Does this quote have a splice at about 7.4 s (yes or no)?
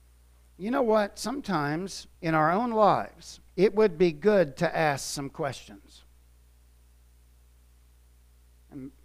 no